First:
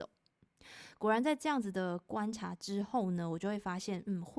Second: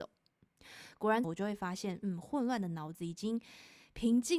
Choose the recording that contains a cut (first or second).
second